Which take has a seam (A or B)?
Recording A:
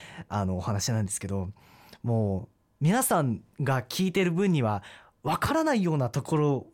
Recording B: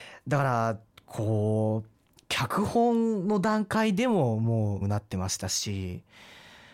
B